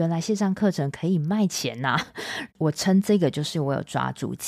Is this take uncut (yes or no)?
no